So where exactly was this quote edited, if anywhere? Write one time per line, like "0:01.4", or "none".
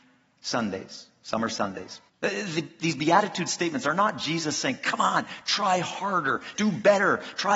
0:02.1
0:06.5